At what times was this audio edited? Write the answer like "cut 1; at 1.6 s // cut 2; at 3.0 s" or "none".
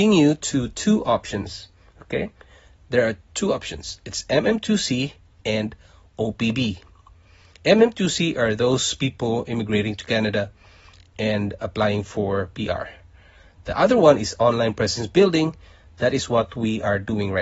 none